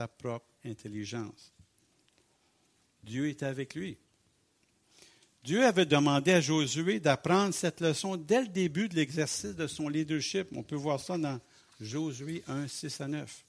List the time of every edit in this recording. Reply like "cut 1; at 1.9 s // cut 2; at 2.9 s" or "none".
none